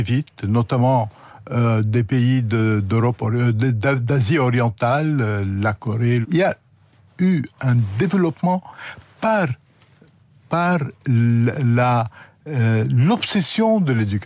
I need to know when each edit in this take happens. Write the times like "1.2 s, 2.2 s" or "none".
6.2 s